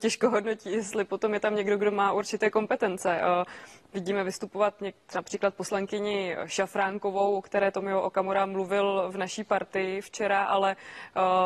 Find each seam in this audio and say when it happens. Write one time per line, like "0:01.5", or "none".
none